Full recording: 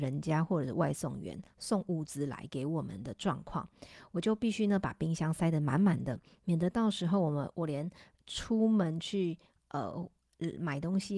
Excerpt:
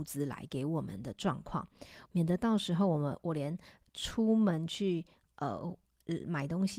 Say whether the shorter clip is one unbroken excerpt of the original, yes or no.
no